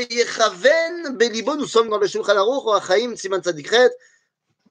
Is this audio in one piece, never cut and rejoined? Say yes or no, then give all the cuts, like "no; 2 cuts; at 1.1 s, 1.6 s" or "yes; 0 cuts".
no; 1 cut; at 1.9 s